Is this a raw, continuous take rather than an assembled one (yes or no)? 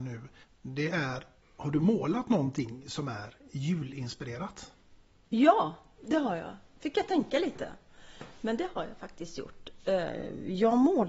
yes